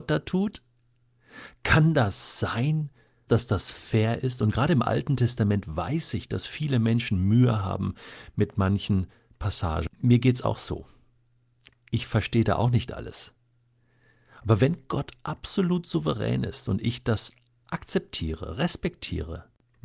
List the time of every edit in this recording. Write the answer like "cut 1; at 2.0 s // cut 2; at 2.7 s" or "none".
cut 1; at 3.3 s // cut 2; at 9.9 s